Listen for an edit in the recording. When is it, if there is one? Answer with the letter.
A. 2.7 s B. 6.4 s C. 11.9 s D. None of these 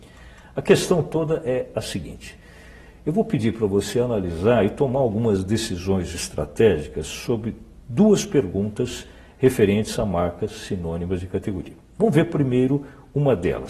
D